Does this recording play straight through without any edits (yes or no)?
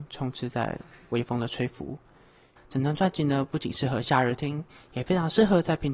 no